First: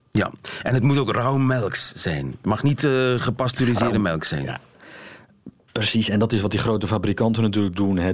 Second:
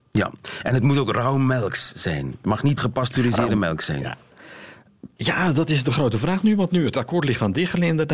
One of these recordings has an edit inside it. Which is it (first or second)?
second